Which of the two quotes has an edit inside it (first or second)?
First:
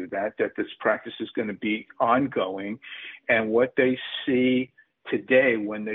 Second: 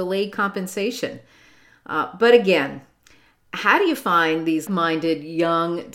second